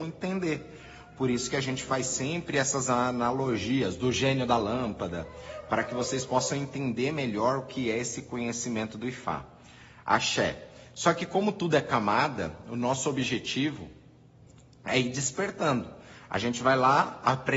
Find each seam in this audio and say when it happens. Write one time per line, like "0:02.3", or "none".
none